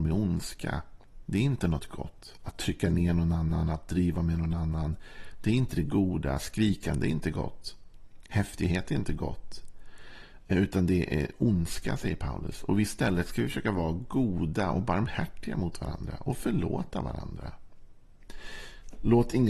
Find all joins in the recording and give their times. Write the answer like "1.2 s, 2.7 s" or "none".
none